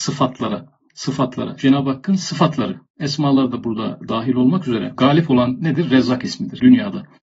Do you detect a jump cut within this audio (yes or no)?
yes